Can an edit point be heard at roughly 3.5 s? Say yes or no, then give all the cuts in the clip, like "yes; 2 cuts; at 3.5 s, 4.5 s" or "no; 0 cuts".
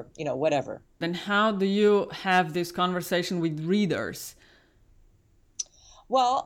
no; 1 cut; at 1.0 s